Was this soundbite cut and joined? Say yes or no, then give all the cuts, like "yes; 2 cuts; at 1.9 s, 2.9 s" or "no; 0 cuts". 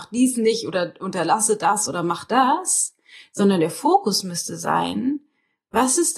no; 0 cuts